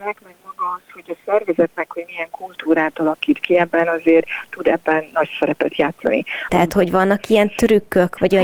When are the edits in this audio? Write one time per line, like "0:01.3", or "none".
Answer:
0:06.5